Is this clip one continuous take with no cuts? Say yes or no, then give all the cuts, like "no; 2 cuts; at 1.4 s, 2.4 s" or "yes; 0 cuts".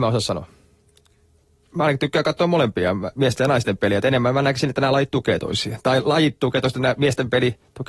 no; 1 cut; at 1.7 s